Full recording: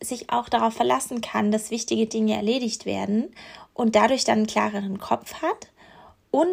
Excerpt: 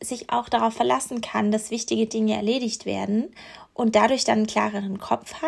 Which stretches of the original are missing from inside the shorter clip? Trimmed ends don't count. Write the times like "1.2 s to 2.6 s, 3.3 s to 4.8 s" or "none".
none